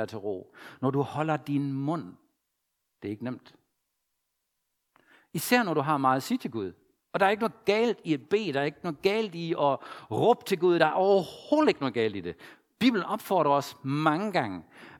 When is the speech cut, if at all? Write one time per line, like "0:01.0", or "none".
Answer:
none